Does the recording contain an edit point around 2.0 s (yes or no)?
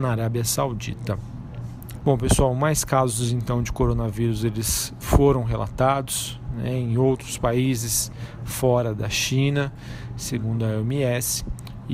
yes